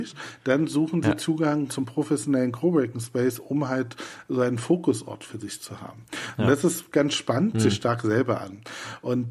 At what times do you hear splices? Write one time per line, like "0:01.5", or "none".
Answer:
0:01.7
0:07.5

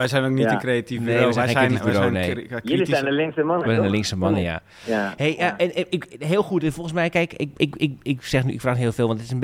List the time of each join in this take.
none

